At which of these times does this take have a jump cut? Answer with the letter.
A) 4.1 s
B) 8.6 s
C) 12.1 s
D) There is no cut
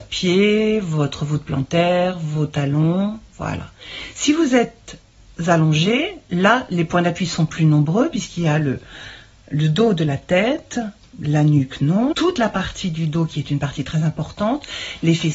C